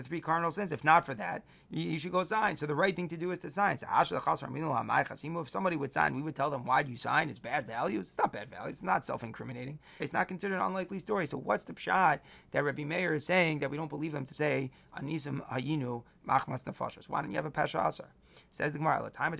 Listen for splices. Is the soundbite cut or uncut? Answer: cut